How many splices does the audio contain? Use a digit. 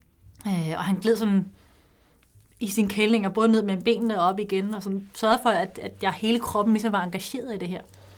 0